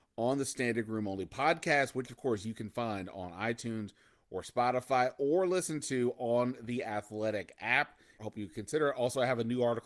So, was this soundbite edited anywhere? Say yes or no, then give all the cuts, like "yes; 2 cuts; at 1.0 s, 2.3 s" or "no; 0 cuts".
yes; 1 cut; at 8.2 s